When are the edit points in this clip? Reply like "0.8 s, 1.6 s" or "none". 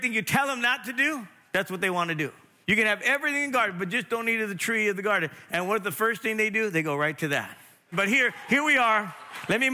2.6 s, 7.9 s